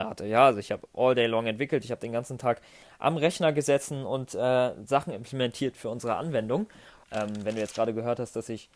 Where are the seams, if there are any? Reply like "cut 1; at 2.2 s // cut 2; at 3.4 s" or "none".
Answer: cut 1; at 7.0 s